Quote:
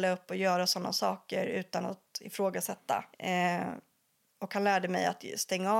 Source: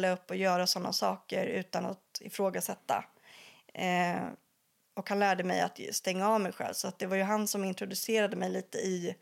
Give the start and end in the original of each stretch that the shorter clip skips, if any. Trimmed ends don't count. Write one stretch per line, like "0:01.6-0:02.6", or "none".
0:03.1-0:03.7